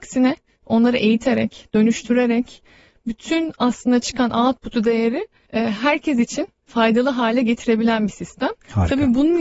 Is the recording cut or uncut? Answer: uncut